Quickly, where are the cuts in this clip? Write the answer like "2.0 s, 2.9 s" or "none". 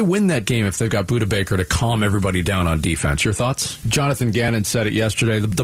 3.8 s